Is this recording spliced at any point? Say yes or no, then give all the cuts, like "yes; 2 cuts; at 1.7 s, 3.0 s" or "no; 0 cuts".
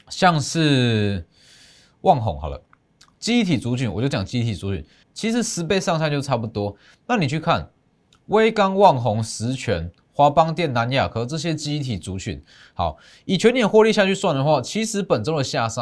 yes; 1 cut; at 5.0 s